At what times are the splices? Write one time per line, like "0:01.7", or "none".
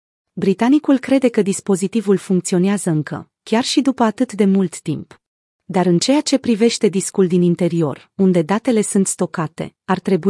0:05.5